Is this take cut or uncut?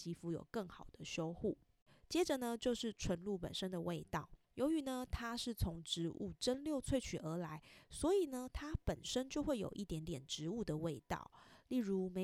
cut